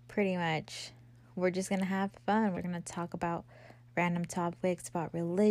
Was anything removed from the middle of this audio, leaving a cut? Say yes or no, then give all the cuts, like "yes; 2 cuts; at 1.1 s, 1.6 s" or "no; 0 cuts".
yes; 1 cut; at 2.5 s